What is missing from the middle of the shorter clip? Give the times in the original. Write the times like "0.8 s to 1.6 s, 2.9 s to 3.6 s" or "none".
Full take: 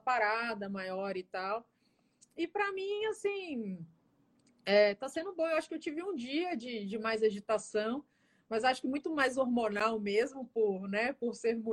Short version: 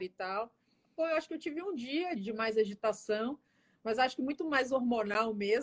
2.1 s to 5.4 s, 6.6 s to 6.8 s

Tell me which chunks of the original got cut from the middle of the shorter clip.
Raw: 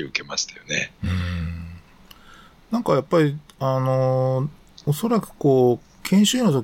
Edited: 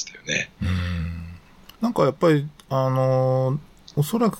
2.2 s to 2.7 s

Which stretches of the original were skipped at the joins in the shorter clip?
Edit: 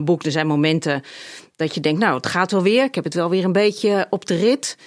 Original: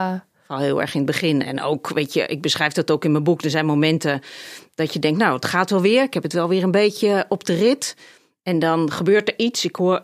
none

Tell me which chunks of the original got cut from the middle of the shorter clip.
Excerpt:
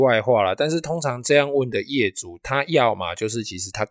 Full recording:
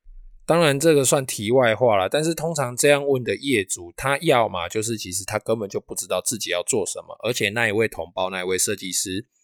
none

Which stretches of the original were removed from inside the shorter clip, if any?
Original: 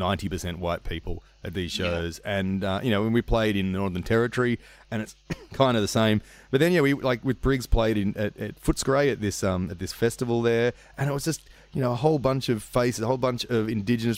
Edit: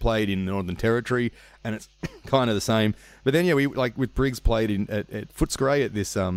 none

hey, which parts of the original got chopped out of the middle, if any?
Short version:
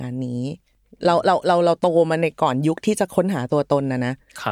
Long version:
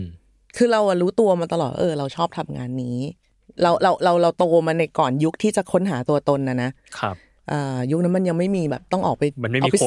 none

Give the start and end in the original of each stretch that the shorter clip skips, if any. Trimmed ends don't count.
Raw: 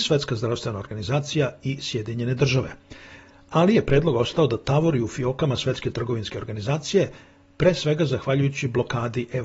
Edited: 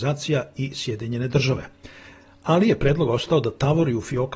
none

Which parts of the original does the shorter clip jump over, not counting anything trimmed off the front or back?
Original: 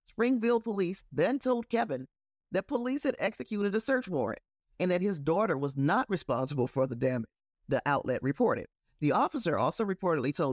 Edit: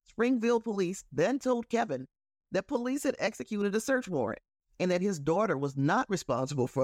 none

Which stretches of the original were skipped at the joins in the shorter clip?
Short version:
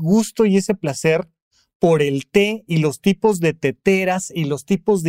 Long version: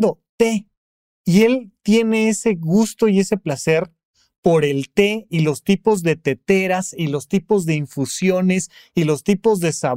none

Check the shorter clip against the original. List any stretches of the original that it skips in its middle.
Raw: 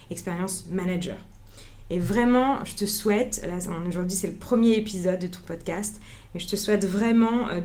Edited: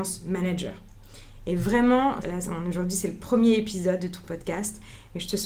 2.7 s to 3.4 s

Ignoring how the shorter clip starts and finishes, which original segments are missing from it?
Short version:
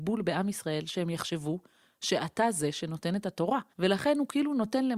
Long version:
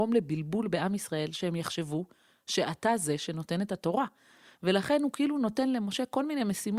4.2 s to 4.5 s

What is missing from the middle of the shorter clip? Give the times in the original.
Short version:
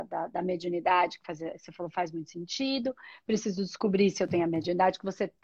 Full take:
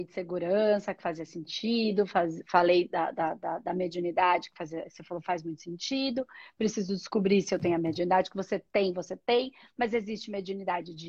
none

